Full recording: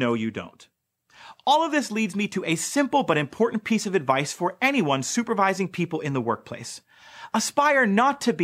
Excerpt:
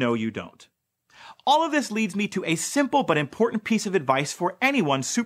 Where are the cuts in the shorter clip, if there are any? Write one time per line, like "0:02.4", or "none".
none